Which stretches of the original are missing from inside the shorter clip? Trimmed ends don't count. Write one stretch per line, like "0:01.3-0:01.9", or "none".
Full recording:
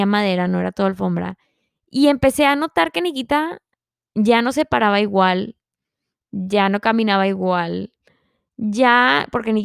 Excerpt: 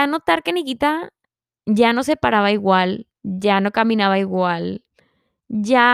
0:05.6-0:06.2